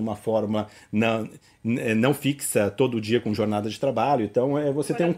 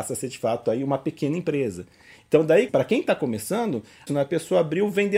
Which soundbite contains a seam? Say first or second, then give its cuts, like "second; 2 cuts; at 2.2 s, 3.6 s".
second; 2 cuts; at 2.7 s, 4.1 s